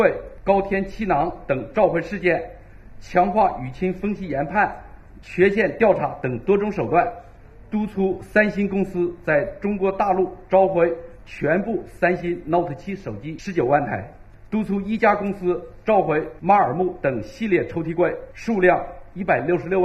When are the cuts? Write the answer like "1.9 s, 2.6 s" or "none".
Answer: 5.2 s